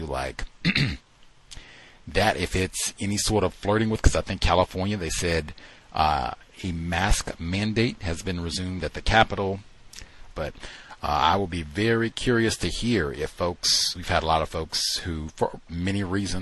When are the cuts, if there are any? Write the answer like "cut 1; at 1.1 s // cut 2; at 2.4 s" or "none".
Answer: cut 1; at 10.3 s // cut 2; at 14.0 s